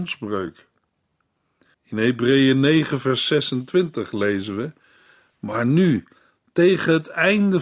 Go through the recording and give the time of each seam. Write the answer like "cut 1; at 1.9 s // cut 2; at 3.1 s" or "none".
cut 1; at 1.7 s